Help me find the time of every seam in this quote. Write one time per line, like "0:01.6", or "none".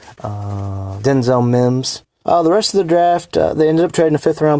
0:01.0
0:02.2